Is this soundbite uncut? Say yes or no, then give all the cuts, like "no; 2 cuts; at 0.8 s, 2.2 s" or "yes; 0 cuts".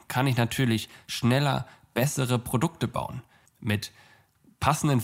no; 1 cut; at 3.5 s